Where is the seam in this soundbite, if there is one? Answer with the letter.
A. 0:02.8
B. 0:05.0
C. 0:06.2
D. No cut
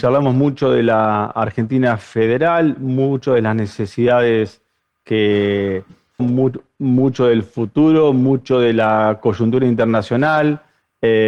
C